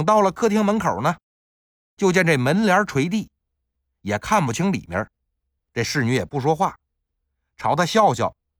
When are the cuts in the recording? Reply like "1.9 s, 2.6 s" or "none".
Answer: 5.6 s